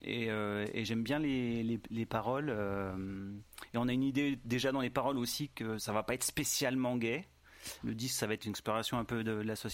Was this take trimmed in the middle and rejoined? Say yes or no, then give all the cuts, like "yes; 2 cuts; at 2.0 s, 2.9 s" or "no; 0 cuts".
yes; 1 cut; at 7.8 s